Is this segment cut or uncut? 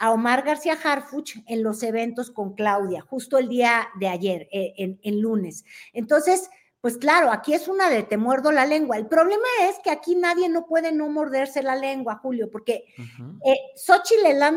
cut